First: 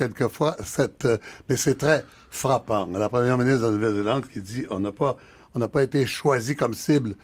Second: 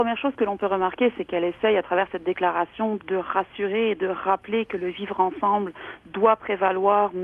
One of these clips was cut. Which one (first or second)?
second